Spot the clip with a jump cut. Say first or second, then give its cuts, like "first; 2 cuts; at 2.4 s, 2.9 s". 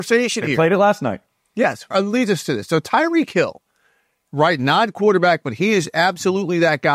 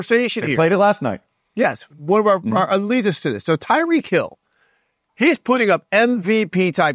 first; 2 cuts; at 1.9 s, 4.3 s